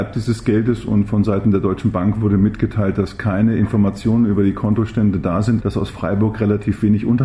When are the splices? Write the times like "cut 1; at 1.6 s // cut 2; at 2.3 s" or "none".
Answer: cut 1; at 5.6 s